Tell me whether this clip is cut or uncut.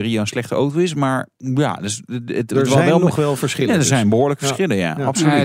uncut